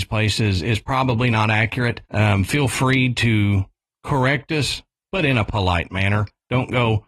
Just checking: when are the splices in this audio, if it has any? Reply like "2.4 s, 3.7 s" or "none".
2.1 s